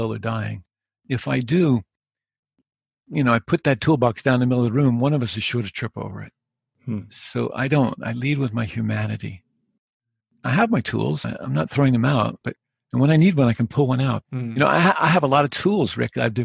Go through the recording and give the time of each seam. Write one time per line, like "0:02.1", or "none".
0:11.2
0:12.4
0:14.2